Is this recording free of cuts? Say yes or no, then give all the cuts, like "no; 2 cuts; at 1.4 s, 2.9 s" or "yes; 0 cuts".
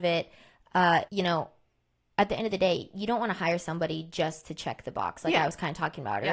no; 1 cut; at 1.1 s